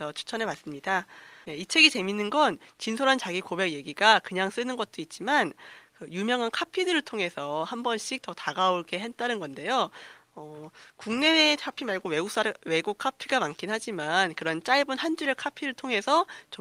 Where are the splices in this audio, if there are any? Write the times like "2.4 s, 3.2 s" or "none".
1.4 s